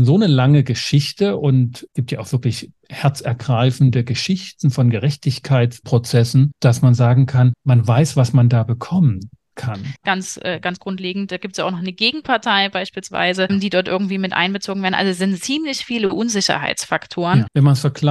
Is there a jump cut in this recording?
yes; 1 cut; at 10.0 s

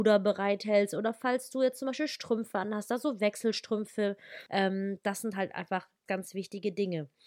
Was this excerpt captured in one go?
no; 2 cuts; at 4.5 s, 6.1 s

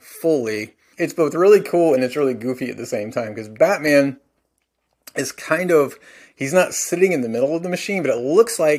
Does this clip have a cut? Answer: yes; 1 cut; at 0.9 s

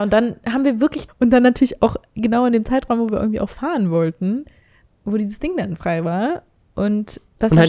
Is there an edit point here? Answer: yes; 1 cut; at 1.1 s

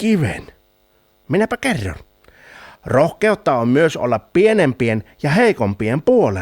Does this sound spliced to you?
yes; 2 cuts; at 1.2 s, 2.8 s

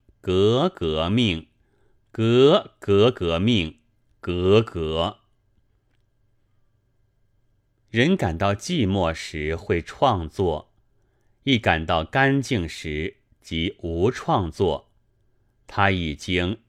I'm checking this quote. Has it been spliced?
no; 0 cuts

